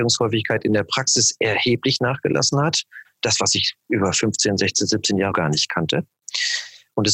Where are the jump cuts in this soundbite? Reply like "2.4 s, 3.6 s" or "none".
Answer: 3.0 s, 5.3 s